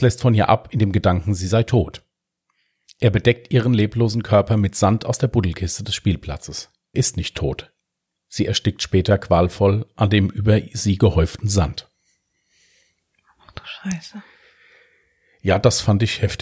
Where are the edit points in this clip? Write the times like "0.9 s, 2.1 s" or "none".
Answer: 6.9 s